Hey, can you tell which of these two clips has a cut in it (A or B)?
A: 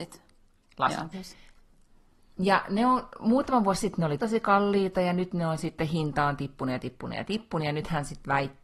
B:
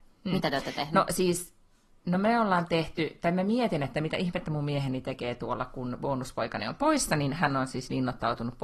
A